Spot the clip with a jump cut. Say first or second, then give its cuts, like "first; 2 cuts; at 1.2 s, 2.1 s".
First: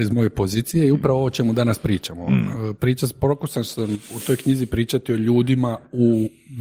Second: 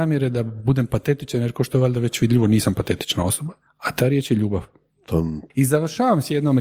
second; 1 cut; at 5.5 s